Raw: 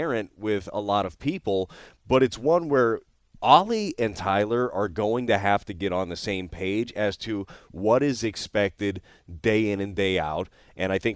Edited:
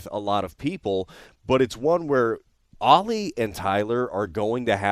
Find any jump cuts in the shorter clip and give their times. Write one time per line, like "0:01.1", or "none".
none